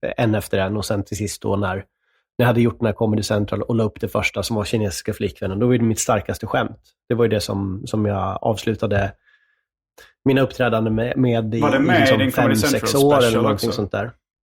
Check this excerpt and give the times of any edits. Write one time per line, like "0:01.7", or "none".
none